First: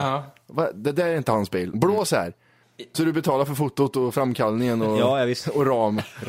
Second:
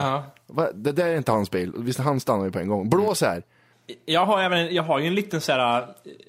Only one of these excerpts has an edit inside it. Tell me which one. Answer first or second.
first